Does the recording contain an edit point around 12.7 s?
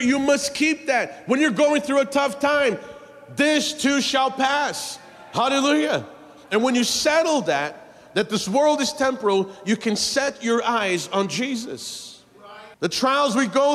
yes; 1 cut; at 12.7 s

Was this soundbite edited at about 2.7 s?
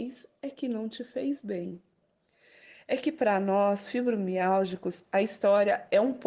no; 0 cuts

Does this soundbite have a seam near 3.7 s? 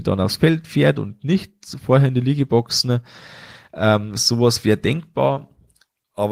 no; 0 cuts

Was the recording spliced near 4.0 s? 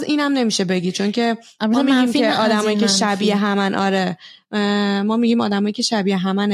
no; 0 cuts

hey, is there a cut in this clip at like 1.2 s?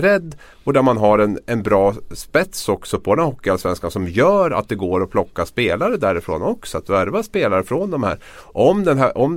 no; 0 cuts

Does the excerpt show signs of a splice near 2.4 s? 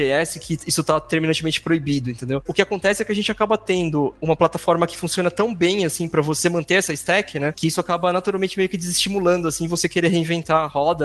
no; 0 cuts

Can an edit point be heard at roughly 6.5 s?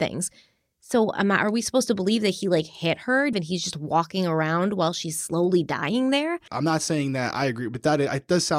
yes; 2 cuts; at 3.3 s, 6.5 s

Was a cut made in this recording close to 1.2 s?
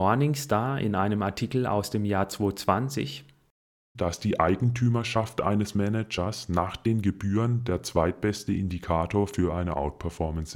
no; 1 cut; at 3.9 s

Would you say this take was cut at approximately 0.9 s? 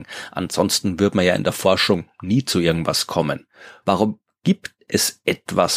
no; 1 cut; at 3.8 s

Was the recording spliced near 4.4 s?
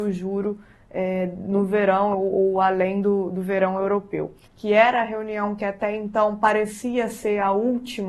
yes; 1 cut; at 4.4 s

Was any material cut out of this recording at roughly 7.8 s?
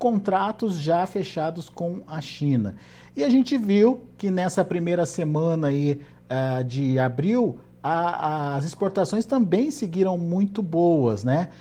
no; 0 cuts

